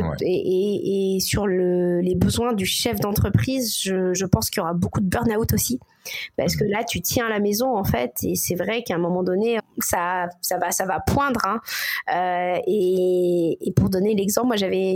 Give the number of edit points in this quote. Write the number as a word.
one